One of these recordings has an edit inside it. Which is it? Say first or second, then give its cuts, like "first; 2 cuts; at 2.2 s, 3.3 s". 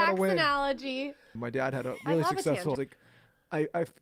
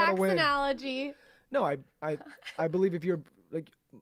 first; 2 cuts; at 1.4 s, 2.8 s